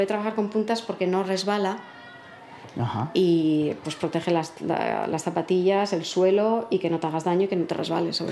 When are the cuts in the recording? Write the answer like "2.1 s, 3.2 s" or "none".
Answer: none